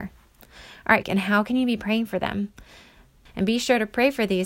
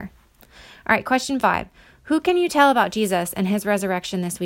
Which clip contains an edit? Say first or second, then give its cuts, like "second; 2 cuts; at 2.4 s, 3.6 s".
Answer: first; 2 cuts; at 1.0 s, 3.3 s